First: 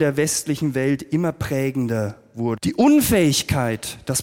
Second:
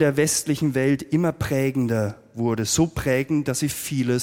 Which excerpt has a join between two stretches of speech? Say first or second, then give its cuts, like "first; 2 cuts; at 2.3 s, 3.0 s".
first; 1 cut; at 2.6 s